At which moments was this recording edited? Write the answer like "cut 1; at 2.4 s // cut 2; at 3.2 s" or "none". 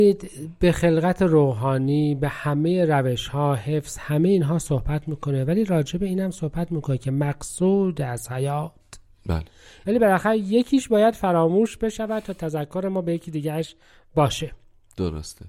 cut 1; at 9.8 s